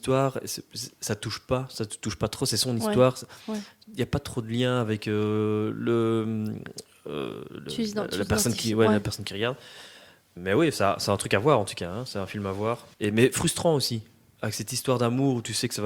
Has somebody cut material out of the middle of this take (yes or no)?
yes